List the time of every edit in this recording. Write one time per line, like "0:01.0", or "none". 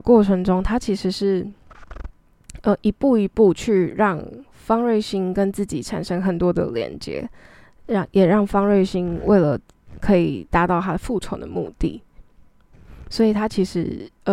none